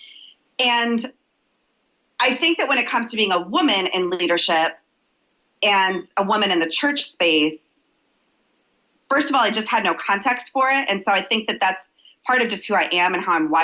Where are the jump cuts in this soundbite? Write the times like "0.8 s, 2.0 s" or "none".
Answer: none

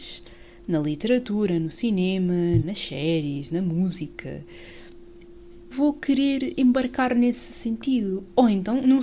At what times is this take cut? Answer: 2.6 s, 5.7 s

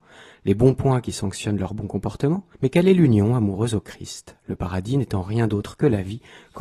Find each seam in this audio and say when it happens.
2.5 s

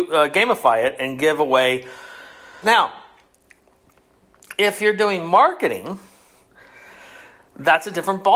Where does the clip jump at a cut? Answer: 2.6 s

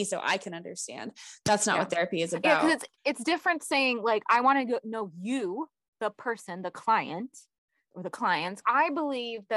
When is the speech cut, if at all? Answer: 3.0 s

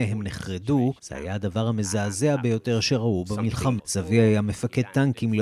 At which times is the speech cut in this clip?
1.0 s, 3.8 s

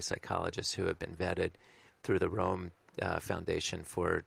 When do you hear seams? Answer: none

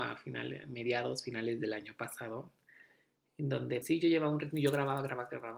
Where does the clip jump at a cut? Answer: 3.8 s

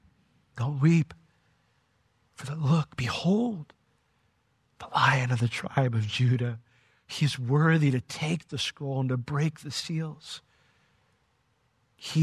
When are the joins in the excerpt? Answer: none

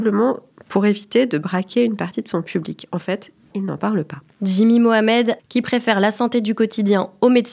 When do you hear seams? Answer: 3.5 s, 5.4 s

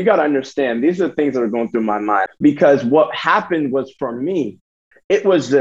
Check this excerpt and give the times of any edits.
2.3 s

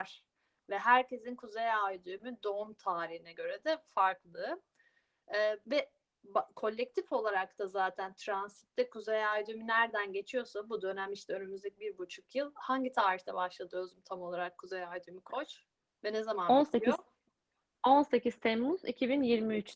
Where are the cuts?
5.6 s

